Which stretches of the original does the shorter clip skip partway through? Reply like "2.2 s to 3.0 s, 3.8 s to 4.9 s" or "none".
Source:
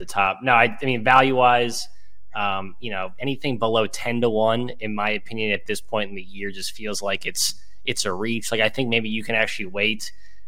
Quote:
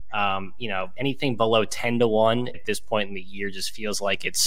4.8 s to 5.5 s